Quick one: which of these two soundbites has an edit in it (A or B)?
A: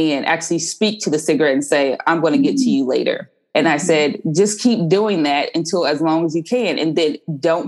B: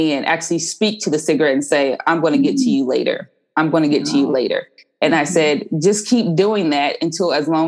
A